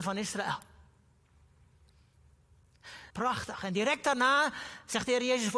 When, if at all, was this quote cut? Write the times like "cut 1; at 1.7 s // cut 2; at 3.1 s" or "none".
cut 1; at 3.1 s